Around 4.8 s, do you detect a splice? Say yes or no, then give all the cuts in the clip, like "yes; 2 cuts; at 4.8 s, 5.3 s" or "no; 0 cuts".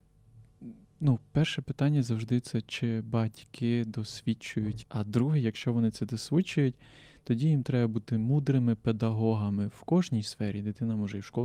yes; 1 cut; at 4.8 s